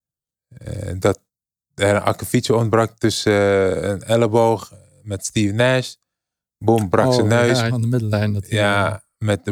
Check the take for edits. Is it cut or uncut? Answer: cut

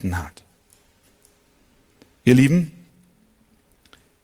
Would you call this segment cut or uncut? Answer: uncut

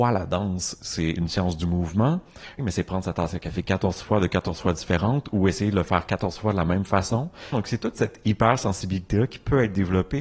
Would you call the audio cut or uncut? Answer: cut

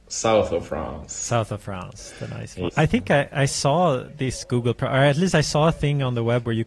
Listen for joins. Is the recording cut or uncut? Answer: cut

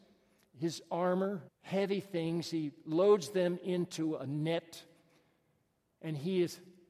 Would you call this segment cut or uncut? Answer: cut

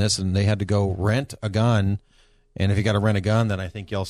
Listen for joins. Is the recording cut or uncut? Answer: uncut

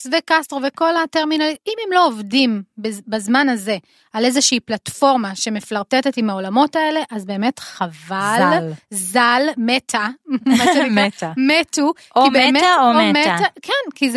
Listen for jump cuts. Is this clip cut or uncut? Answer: uncut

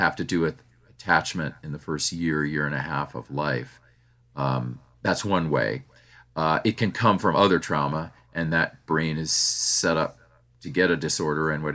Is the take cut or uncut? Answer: uncut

